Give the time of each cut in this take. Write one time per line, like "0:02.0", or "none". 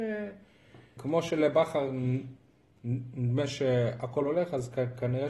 0:01.0